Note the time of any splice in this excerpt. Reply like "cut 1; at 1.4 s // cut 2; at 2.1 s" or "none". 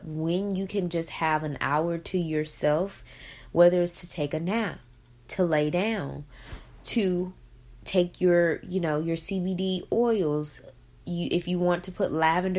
none